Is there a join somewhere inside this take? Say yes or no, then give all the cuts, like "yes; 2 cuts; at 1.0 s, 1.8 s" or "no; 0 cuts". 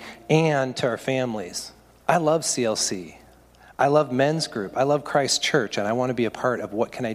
no; 0 cuts